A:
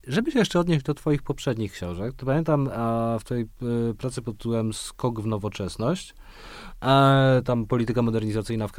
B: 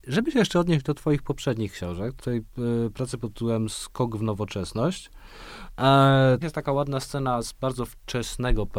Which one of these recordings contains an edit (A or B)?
B